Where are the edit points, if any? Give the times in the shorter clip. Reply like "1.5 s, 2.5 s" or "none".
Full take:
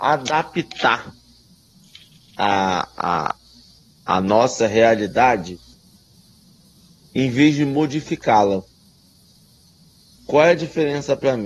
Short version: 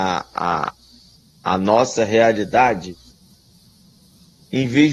none